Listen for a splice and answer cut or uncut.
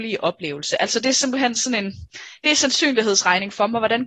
uncut